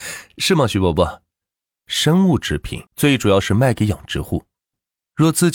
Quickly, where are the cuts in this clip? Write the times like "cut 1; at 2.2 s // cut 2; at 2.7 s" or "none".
cut 1; at 1.7 s // cut 2; at 2.9 s